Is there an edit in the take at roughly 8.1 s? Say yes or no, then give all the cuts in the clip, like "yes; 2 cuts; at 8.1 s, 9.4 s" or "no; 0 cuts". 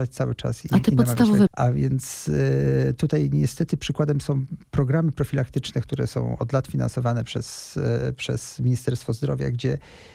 no; 1 cut; at 1.5 s